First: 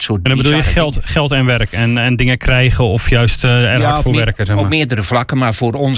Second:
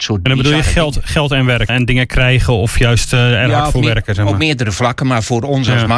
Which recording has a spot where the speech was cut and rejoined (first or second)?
second